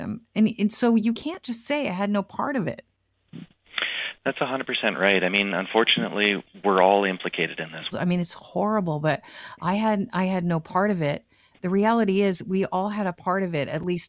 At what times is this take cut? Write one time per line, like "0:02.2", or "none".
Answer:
0:07.9